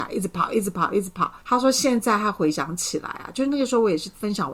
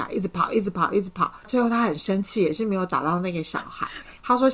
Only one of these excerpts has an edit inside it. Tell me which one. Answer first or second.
first